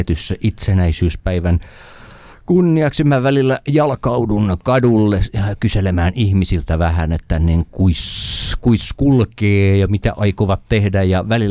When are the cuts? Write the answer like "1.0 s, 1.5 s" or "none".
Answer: none